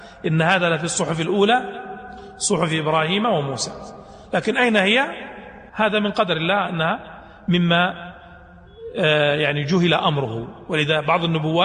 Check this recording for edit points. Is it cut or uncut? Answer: cut